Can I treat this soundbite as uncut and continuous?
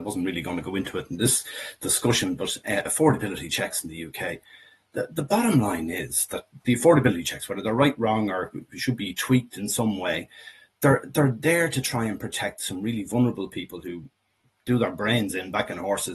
yes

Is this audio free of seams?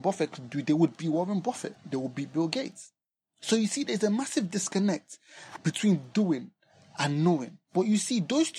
no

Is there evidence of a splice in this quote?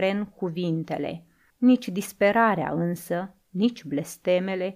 yes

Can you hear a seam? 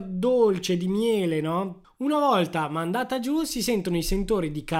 yes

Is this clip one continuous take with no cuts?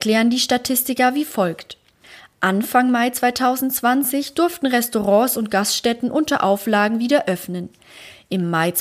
yes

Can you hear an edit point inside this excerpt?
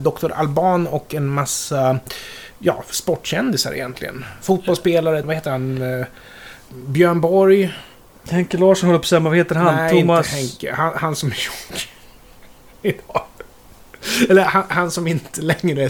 yes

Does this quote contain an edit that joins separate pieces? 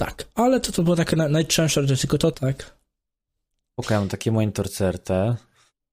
yes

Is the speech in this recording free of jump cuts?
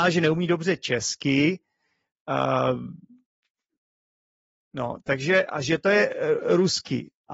no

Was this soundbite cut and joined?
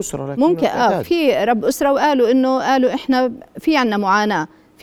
yes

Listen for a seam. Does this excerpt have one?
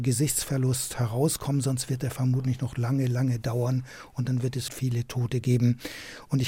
yes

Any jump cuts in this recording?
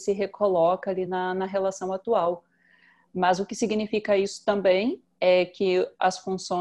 no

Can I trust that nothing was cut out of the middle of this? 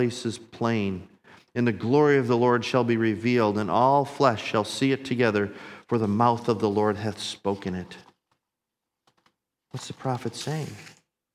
yes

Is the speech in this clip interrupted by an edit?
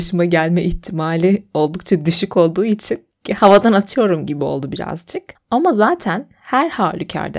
no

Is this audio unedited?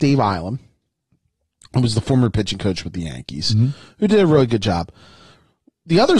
yes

